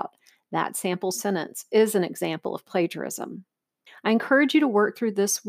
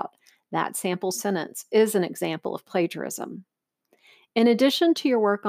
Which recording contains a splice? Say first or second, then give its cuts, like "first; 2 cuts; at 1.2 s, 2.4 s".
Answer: first; 1 cut; at 3.9 s